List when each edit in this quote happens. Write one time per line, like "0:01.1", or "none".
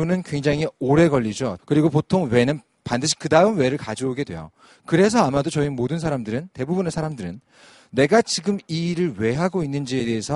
0:01.6